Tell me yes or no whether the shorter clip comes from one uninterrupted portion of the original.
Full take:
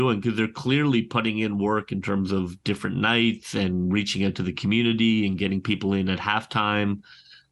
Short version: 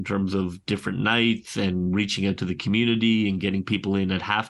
yes